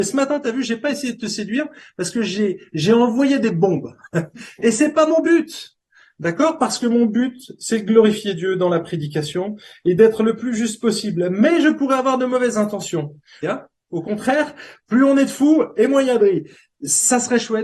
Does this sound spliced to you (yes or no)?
yes